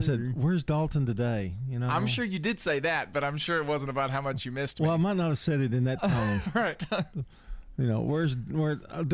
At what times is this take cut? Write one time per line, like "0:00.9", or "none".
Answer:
none